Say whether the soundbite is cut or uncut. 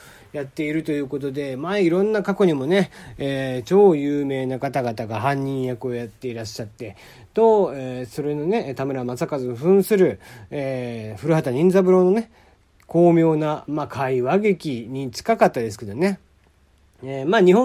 uncut